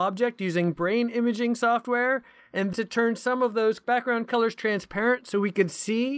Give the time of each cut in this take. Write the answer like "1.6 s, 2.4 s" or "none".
2.7 s